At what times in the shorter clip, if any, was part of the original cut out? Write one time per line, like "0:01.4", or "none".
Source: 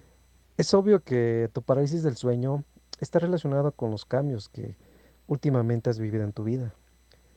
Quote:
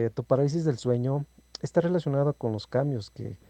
none